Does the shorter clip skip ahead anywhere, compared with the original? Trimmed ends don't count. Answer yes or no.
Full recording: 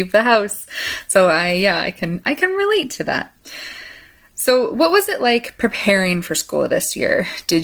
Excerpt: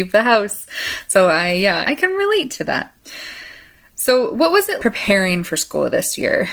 yes